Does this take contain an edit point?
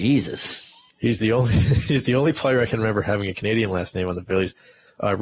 yes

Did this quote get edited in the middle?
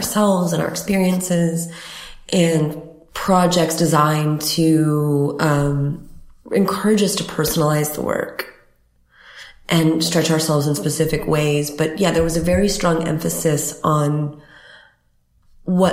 no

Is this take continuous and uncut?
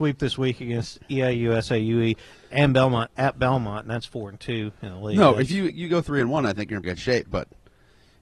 no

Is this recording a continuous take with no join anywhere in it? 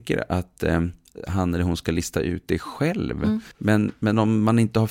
no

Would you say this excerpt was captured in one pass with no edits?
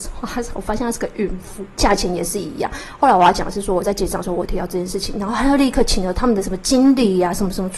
no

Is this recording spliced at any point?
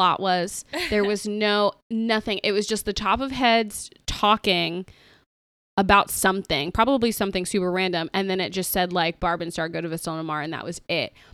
no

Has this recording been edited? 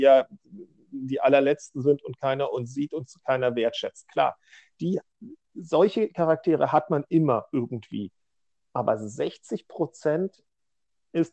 no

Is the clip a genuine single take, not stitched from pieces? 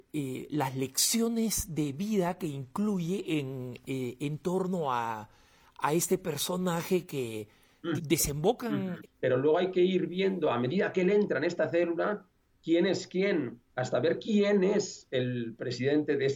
no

